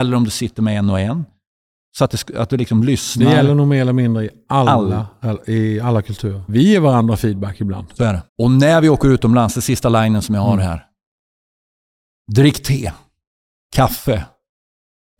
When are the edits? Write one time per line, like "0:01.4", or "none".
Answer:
0:06.5
0:08.3